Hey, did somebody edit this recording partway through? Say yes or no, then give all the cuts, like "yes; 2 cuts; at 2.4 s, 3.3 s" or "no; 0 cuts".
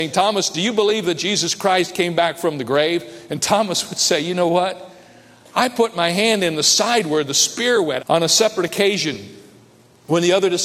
yes; 2 cuts; at 5.4 s, 8.0 s